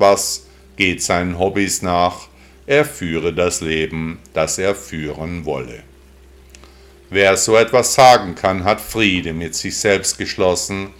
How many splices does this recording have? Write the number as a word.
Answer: zero